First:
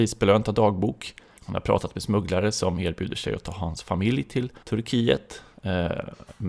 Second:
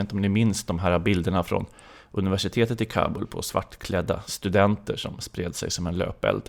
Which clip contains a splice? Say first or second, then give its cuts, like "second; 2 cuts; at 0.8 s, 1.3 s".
first; 2 cuts; at 1.4 s, 4.6 s